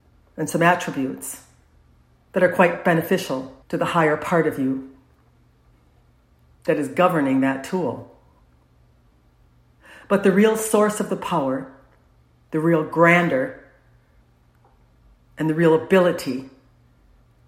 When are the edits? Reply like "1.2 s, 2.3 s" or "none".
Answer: 3.6 s